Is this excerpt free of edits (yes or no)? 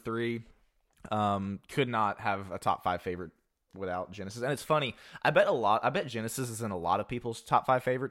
yes